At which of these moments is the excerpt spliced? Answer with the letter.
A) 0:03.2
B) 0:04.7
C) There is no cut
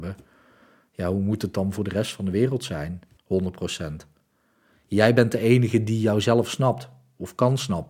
A